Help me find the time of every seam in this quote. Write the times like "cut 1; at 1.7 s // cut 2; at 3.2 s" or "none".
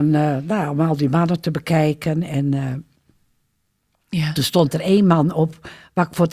none